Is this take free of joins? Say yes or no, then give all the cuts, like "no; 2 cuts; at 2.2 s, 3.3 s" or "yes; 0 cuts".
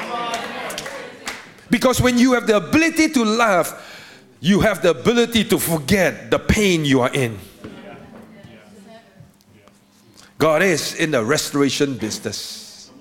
yes; 0 cuts